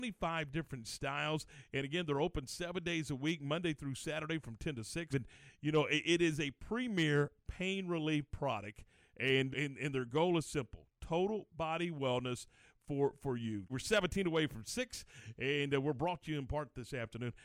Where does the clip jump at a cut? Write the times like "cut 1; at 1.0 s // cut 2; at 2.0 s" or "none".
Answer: cut 1; at 5.1 s // cut 2; at 9.5 s // cut 3; at 13.7 s